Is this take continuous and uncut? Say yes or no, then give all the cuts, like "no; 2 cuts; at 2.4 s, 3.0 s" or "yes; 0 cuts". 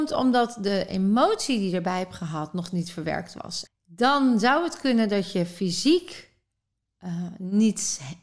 no; 1 cut; at 3.7 s